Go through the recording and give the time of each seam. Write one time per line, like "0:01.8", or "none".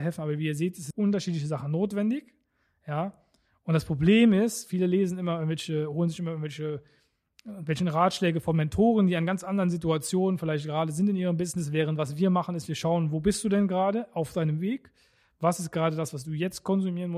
0:00.9